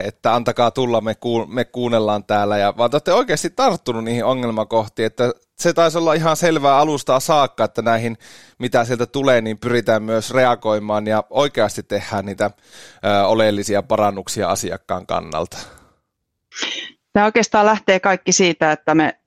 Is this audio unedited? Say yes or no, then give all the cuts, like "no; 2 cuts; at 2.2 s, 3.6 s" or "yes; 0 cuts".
yes; 0 cuts